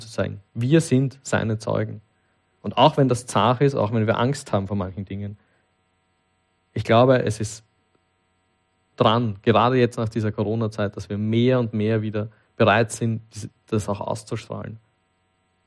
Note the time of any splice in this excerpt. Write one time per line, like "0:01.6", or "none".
0:08.9